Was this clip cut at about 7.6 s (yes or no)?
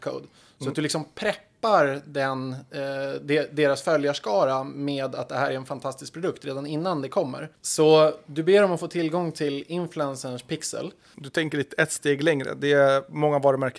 yes